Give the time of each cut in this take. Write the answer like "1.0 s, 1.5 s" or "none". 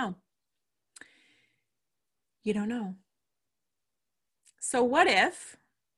none